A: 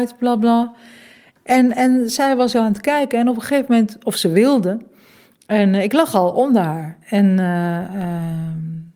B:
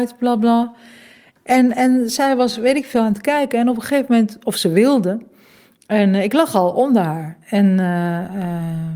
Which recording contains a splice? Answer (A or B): A